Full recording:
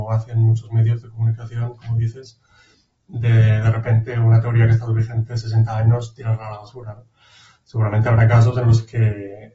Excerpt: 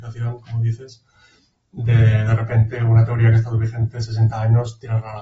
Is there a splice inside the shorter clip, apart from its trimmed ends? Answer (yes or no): no